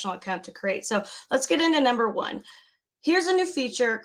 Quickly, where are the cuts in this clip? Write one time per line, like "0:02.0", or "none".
none